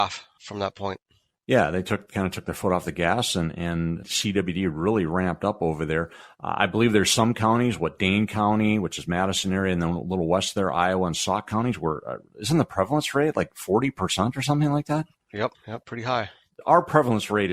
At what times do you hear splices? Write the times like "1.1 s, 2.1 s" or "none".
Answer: none